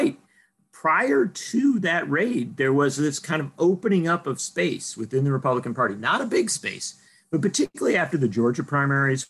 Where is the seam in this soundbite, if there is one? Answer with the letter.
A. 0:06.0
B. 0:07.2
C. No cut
C